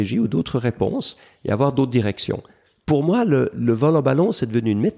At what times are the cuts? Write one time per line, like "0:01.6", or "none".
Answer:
none